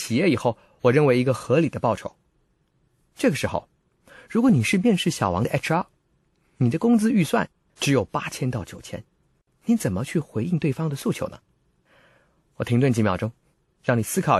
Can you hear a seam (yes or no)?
no